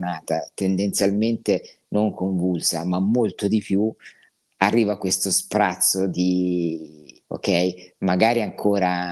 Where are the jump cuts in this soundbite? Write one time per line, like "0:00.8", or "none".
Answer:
0:07.2